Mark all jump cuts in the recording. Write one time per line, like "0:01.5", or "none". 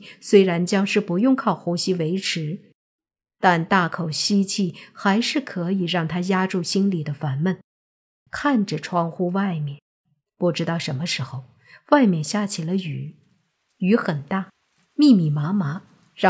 0:08.3